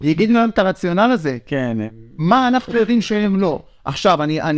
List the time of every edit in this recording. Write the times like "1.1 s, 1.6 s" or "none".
none

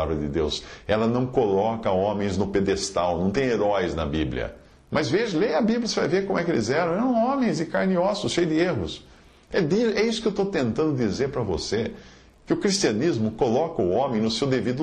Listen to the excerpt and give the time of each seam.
4.7 s

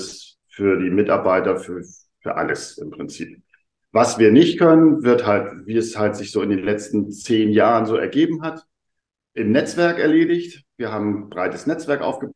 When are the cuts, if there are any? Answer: none

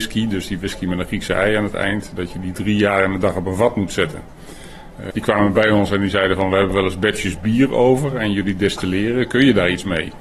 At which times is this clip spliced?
5.1 s

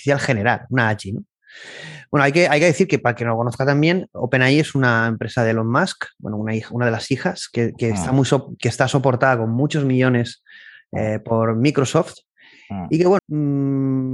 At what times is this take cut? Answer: 13.2 s

